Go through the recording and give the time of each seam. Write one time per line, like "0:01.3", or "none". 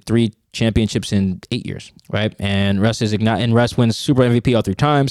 0:02.0